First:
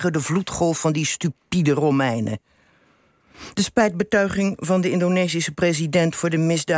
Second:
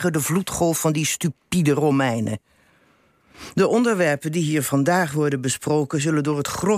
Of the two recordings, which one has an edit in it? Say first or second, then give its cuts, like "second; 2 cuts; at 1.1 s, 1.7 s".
first; 1 cut; at 3.5 s